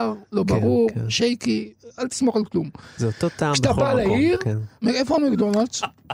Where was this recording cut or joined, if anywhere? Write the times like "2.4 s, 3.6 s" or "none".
4.8 s